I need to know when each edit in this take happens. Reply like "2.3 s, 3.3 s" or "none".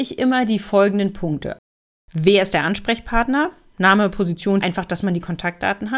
4.6 s